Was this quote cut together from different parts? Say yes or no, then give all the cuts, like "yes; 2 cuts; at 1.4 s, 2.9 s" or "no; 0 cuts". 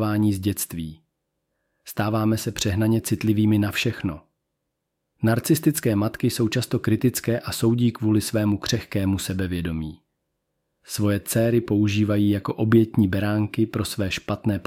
no; 0 cuts